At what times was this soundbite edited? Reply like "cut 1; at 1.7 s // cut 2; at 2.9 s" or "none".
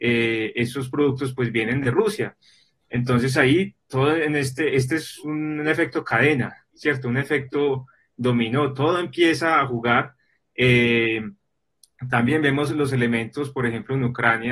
none